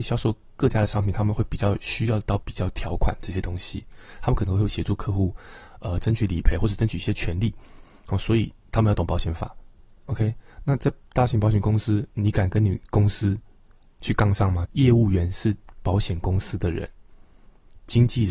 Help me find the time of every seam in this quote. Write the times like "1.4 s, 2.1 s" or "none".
14.6 s